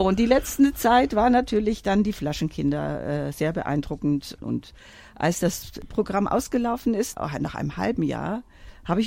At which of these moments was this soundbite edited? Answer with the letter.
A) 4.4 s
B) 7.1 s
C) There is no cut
A